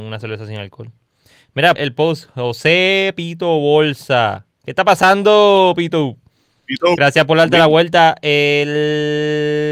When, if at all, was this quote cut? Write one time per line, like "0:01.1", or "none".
0:01.8